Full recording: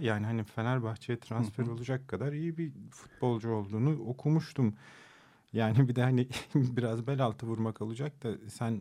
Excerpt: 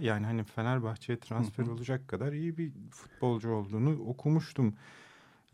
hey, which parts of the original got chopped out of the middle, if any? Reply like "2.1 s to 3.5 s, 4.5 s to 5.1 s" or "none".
none